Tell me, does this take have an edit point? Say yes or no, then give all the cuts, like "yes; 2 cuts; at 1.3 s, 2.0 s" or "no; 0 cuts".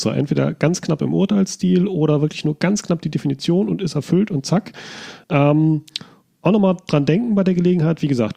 yes; 1 cut; at 5.2 s